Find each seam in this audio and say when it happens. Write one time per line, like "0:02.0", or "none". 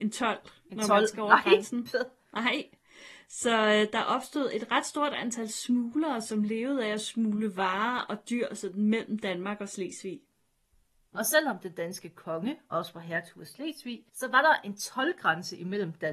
0:11.1
0:14.1